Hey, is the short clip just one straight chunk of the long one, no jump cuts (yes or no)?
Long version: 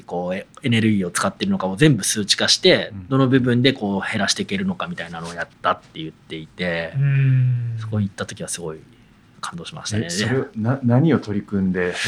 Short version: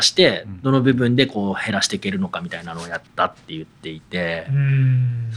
yes